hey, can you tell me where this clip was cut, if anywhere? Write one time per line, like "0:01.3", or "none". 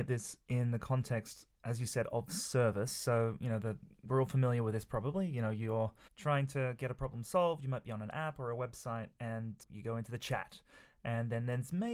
none